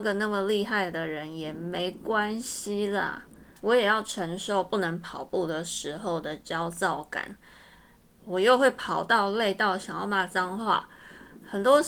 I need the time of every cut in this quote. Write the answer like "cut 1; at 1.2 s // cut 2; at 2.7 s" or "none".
cut 1; at 3.6 s // cut 2; at 8.2 s